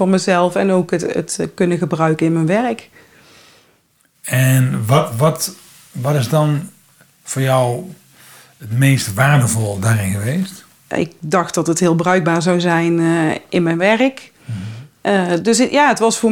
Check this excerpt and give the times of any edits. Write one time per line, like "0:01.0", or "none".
0:10.9